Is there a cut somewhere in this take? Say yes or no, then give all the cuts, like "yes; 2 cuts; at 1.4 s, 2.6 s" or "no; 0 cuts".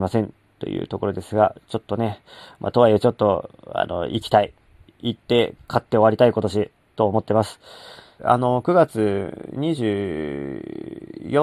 yes; 1 cut; at 8.2 s